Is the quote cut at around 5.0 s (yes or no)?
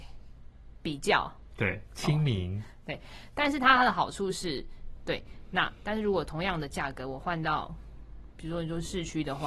yes